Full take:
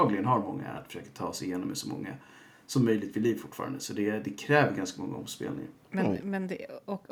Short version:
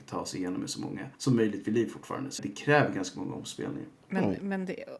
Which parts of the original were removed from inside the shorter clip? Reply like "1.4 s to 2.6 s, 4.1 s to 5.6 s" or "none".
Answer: 2.2 s to 2.6 s, 3.9 s to 4.2 s